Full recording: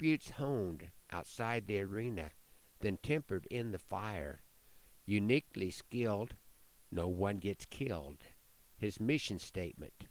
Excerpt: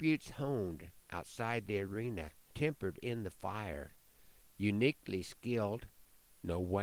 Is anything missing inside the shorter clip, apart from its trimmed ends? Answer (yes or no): yes